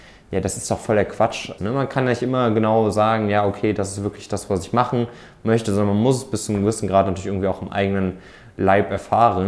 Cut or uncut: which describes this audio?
cut